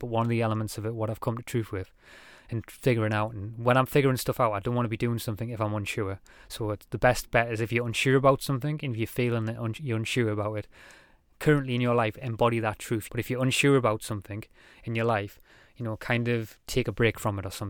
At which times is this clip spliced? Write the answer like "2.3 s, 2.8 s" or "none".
13.1 s